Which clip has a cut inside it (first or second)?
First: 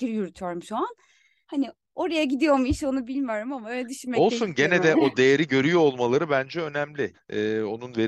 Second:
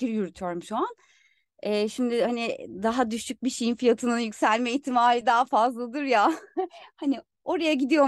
first